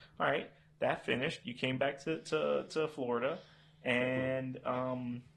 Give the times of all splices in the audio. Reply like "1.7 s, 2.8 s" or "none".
none